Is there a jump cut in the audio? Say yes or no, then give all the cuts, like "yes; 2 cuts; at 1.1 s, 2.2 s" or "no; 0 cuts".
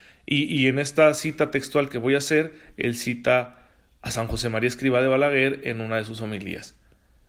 no; 0 cuts